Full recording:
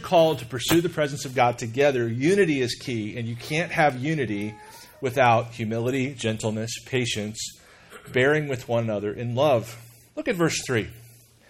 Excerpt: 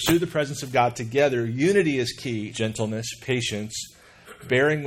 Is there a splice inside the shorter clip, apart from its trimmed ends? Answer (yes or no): yes